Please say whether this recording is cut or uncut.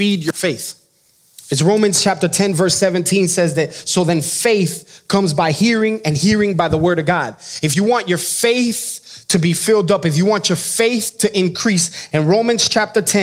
uncut